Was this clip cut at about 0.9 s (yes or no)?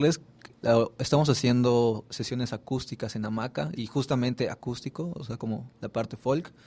no